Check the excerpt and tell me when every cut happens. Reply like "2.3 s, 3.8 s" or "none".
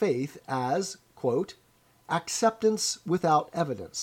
none